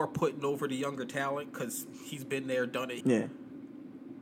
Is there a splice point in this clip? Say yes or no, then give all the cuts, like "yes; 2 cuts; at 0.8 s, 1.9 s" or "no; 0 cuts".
yes; 1 cut; at 3.0 s